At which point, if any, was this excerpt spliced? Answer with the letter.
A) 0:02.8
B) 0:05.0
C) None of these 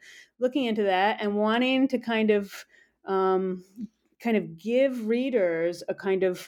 C